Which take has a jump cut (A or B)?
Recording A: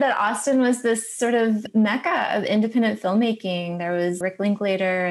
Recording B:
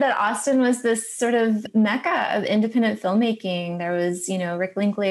A